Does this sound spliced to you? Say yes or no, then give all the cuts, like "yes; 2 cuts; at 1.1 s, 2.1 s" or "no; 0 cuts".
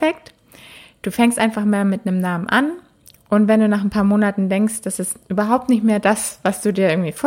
no; 0 cuts